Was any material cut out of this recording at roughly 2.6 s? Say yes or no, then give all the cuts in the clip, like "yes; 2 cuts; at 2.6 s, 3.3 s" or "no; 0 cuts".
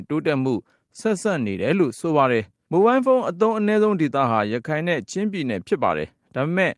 yes; 1 cut; at 2.6 s